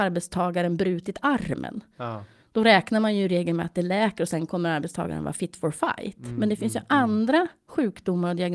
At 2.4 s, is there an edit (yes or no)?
no